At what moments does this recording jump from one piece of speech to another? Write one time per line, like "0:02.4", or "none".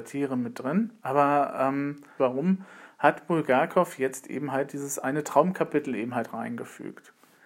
0:01.0
0:02.2